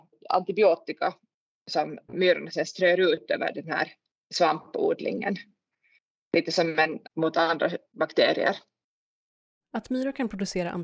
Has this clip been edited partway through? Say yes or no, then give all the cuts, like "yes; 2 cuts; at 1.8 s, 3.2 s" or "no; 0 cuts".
yes; 2 cuts; at 7.1 s, 9.6 s